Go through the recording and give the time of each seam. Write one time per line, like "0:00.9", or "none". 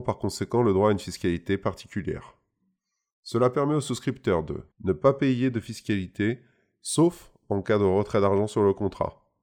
0:04.7